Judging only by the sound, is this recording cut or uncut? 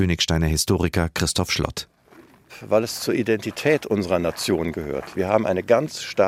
uncut